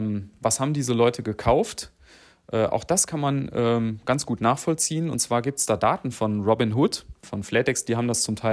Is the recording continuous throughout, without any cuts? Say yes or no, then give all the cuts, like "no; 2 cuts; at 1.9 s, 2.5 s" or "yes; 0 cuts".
no; 1 cut; at 7.2 s